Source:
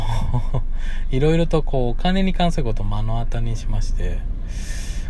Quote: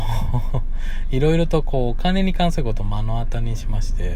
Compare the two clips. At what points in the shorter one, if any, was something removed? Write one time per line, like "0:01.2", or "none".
none